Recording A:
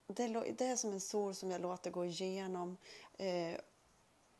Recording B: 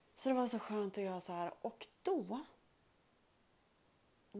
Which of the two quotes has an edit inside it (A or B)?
A